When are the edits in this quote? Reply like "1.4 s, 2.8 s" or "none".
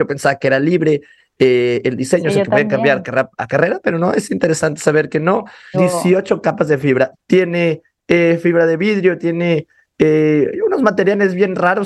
5.7 s, 7.1 s, 9.2 s